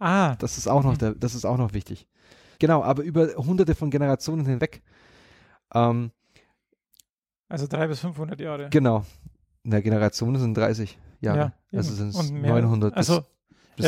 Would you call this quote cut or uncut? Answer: cut